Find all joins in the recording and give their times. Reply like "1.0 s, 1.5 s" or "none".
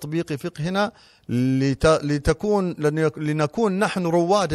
none

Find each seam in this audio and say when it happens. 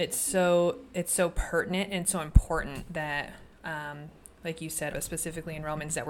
4.9 s

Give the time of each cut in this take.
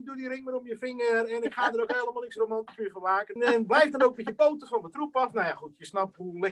3.4 s

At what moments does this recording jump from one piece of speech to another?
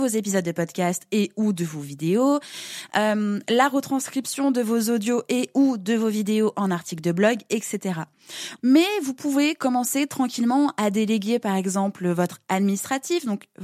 8.6 s

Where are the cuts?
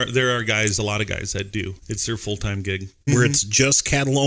1.8 s, 3.1 s

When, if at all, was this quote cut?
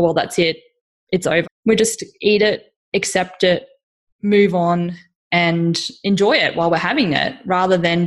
1.4 s

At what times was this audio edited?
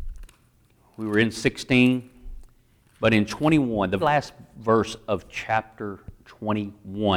4.0 s

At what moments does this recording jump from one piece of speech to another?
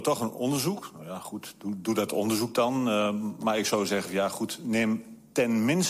none

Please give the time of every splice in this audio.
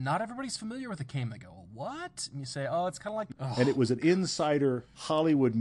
3.3 s

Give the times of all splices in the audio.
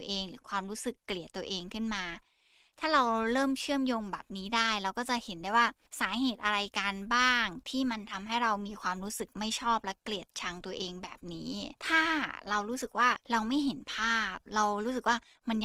11.8 s, 13.2 s

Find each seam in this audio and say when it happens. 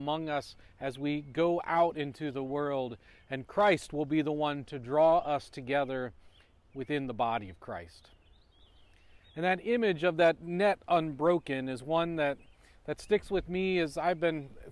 none

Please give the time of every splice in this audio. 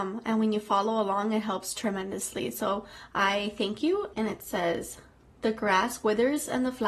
4.1 s

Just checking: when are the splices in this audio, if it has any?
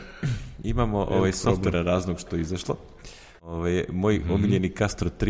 3.4 s

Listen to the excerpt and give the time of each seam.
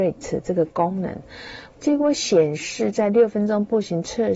1.7 s

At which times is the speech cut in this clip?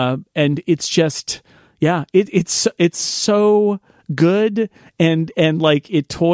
none

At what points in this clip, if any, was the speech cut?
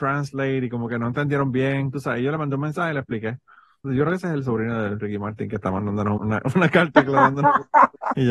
3.8 s, 6.2 s

